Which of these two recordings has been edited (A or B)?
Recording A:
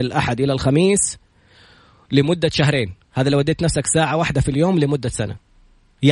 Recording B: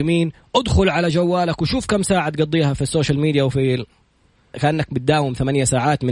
B